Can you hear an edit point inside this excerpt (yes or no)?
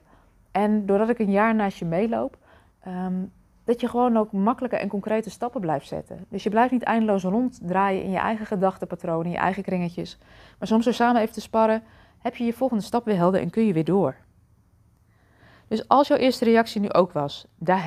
yes